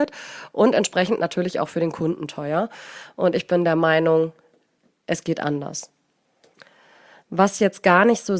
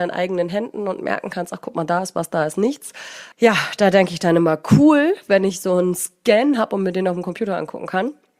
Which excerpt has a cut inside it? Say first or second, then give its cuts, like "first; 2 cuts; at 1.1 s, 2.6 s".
second; 1 cut; at 3.3 s